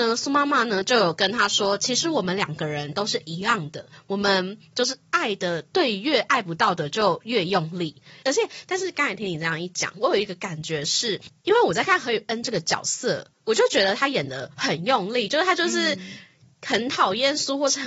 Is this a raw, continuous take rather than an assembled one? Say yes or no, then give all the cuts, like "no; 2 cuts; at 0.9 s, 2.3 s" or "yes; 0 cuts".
no; 1 cut; at 8.2 s